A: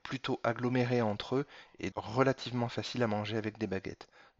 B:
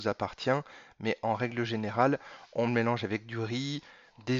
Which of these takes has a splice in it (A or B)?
A